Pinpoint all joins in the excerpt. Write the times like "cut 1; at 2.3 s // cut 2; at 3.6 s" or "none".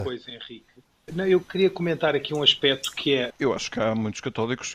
cut 1; at 1.1 s // cut 2; at 3.3 s